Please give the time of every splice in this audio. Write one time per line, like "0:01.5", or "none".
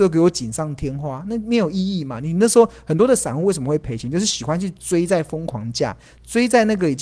none